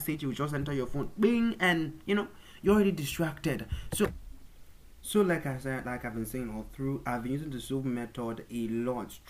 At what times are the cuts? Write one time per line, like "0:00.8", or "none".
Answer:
none